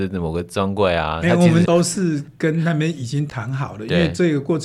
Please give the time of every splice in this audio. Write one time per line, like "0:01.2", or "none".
0:01.6